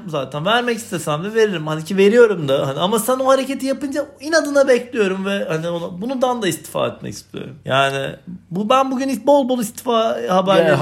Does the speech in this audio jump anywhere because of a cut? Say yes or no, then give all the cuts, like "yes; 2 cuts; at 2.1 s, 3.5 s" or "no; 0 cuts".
no; 0 cuts